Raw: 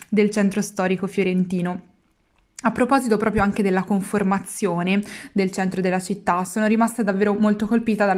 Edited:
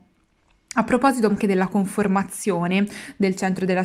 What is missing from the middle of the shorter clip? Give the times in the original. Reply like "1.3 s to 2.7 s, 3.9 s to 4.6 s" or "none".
3.2 s to 3.5 s

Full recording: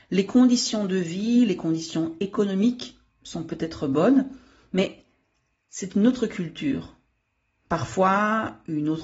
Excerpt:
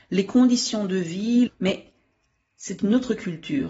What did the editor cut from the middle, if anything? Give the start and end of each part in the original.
1.5 s to 4.6 s

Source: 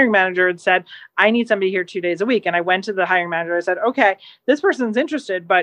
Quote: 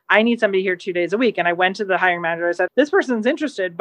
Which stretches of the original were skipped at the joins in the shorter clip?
3.8 s to 4.4 s

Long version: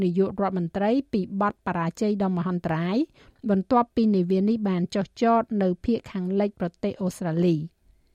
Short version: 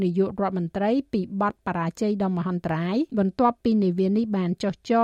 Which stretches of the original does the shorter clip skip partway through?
3.1 s to 3.4 s

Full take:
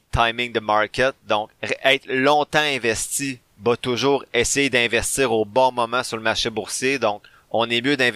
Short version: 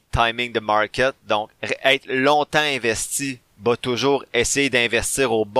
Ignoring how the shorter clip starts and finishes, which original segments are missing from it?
none

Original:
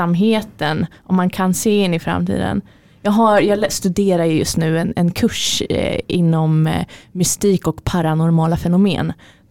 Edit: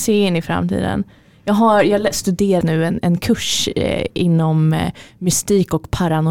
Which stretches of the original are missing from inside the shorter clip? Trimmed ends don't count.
4.2 s to 4.5 s

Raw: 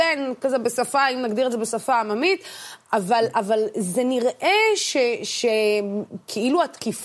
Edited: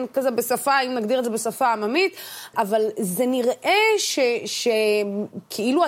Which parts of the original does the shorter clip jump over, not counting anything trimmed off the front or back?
2.8 s to 3.3 s

